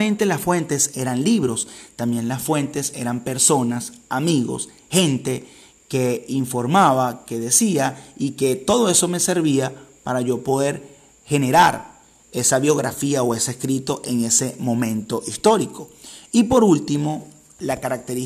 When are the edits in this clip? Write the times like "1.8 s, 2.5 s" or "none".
none